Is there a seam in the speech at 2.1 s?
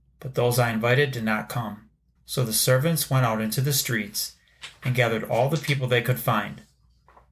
yes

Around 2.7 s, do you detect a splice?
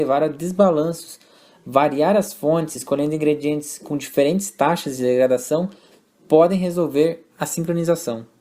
no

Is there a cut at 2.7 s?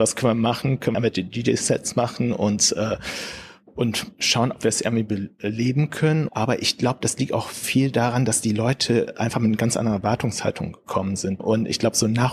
no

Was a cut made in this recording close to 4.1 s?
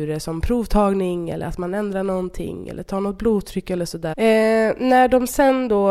yes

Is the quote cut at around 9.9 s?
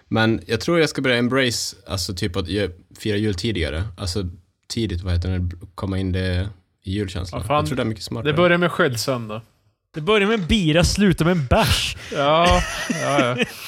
yes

